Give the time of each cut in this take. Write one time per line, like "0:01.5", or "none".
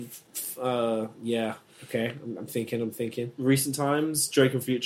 none